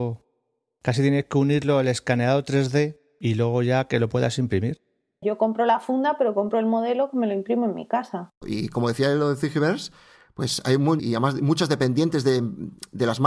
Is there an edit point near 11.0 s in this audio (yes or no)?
yes